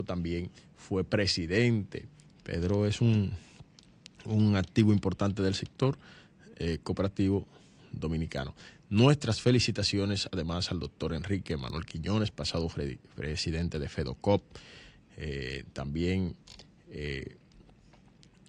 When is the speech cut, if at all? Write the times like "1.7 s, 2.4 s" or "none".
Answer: none